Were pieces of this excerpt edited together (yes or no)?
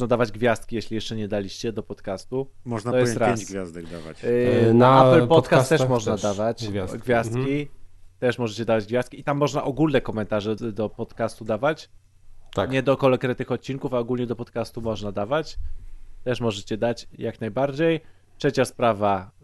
yes